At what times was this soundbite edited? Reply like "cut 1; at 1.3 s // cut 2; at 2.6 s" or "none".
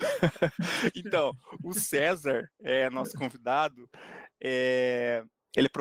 none